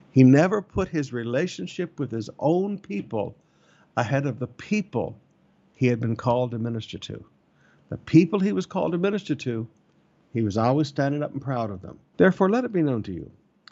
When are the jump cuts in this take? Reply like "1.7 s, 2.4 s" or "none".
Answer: 12.1 s